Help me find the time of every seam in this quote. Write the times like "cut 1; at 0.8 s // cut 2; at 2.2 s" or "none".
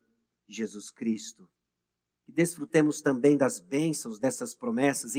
cut 1; at 2.1 s